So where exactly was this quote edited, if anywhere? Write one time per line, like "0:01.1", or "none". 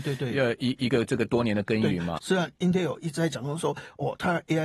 0:02.2